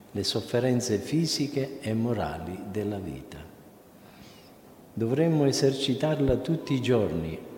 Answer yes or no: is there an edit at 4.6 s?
no